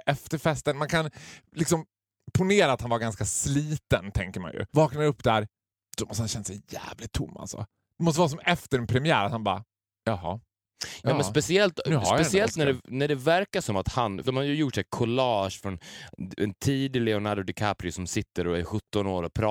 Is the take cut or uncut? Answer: cut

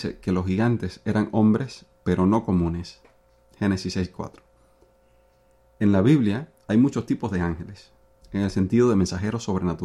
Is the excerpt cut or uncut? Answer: uncut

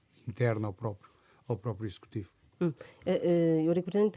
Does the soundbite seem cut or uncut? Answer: uncut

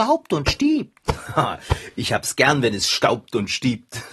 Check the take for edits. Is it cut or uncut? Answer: uncut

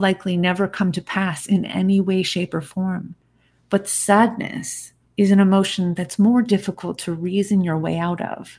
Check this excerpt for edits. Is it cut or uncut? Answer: uncut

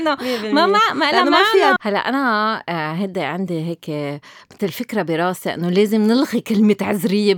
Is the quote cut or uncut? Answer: cut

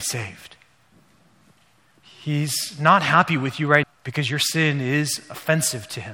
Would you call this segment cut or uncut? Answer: cut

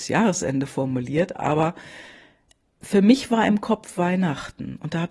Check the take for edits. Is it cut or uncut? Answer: uncut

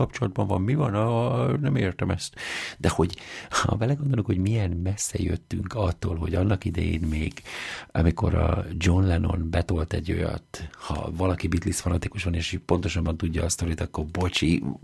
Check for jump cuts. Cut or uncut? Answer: uncut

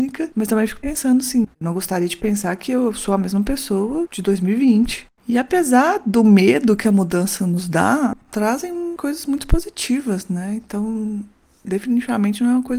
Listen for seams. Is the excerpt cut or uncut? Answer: cut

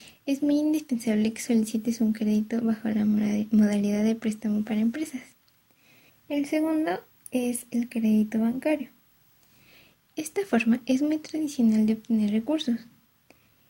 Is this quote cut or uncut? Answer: cut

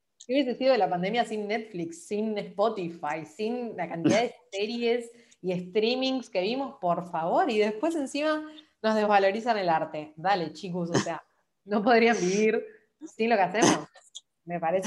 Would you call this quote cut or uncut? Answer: uncut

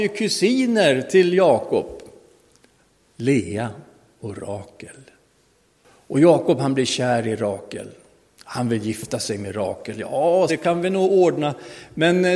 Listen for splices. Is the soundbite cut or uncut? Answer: cut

